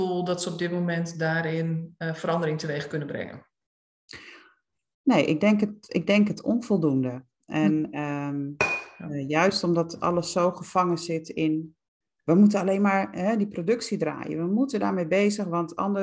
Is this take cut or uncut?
uncut